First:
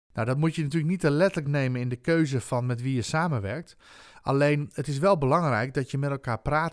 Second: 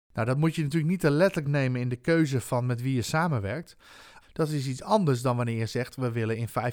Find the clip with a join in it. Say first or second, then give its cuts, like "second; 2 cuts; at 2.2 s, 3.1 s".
second; 1 cut; at 4.2 s